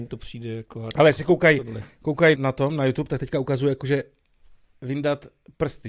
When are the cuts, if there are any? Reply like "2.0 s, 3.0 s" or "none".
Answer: 2.3 s